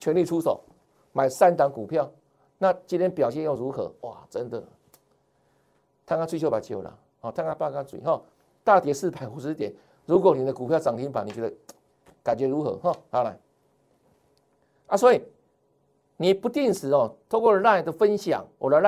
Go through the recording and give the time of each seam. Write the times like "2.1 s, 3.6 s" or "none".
none